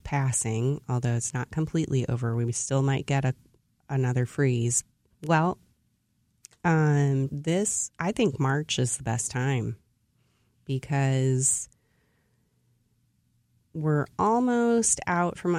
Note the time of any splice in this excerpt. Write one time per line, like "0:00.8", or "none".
0:05.1
0:07.3

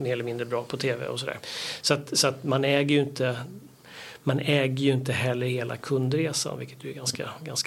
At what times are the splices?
none

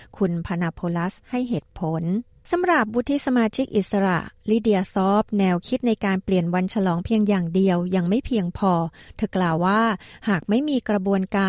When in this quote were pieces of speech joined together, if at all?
0:09.6

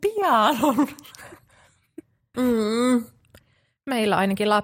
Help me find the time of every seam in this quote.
0:02.3

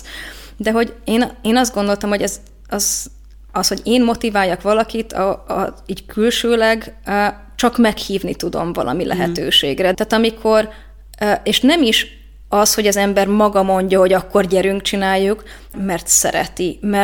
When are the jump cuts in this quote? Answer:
0:09.9
0:15.7

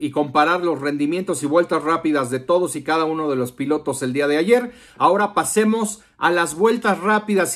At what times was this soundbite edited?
none

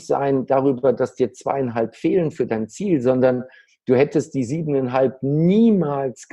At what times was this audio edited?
none

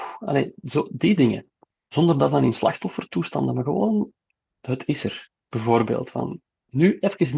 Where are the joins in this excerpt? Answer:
0:05.5

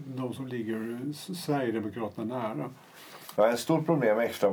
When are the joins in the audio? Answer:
0:03.4

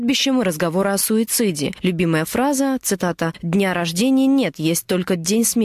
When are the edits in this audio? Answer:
none

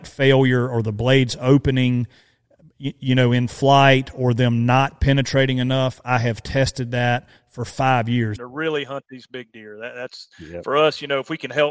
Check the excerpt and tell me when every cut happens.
0:08.4

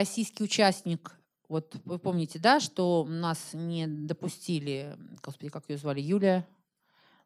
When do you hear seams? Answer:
none

